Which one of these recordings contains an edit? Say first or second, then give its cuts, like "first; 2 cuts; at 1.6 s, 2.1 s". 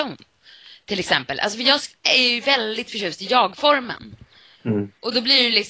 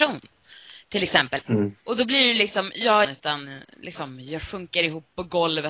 second; 2 cuts; at 1.4 s, 3.0 s